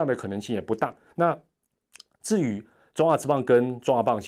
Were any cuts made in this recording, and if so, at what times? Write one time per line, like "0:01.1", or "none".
0:01.1